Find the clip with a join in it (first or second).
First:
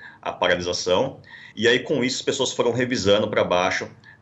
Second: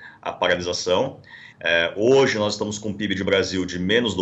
second